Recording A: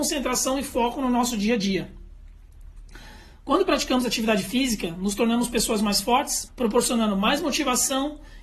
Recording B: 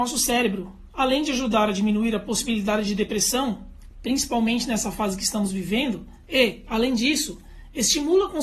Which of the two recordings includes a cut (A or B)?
A